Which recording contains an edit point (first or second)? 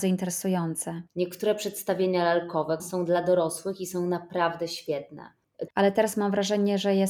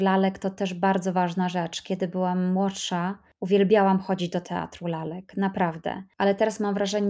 first